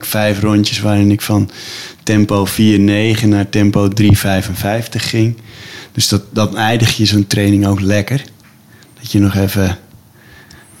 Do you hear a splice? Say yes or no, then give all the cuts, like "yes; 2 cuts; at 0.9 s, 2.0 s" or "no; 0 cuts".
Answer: no; 0 cuts